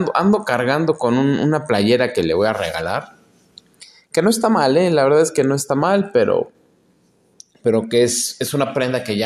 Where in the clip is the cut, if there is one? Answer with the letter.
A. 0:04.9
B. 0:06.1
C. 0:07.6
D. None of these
D